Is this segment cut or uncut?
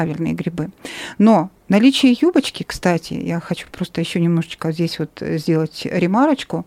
uncut